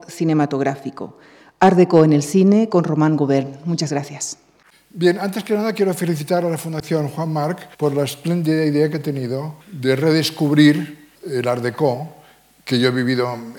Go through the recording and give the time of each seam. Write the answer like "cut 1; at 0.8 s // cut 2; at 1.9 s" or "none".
cut 1; at 7.7 s // cut 2; at 9.6 s // cut 3; at 11.2 s